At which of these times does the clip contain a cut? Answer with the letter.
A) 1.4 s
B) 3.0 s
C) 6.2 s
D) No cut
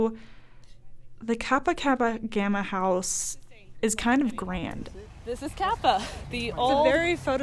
C